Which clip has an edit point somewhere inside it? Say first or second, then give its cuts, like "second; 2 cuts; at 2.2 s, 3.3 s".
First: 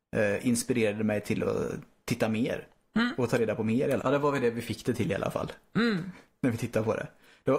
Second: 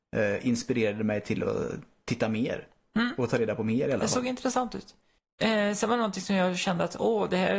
first; 1 cut; at 4.0 s